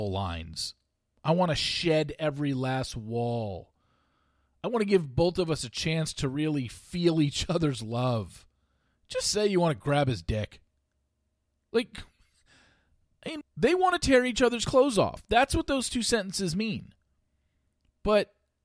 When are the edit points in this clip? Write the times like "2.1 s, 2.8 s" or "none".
13.4 s